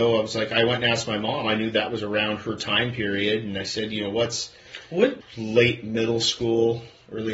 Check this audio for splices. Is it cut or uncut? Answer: cut